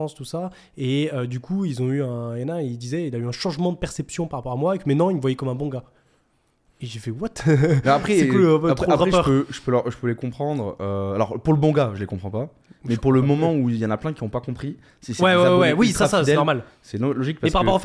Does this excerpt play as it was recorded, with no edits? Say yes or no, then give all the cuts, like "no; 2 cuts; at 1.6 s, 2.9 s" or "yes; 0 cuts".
yes; 0 cuts